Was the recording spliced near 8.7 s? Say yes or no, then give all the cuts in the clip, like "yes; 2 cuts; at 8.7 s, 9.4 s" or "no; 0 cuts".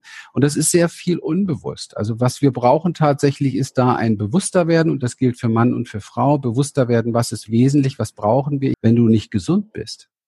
yes; 2 cuts; at 7.5 s, 8.7 s